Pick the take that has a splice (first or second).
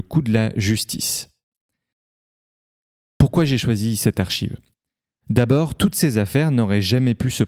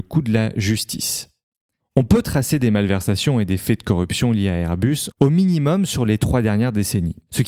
second